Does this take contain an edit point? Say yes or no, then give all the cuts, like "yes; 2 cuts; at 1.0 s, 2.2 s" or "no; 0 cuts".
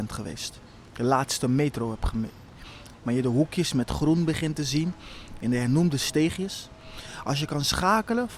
yes; 1 cut; at 2.9 s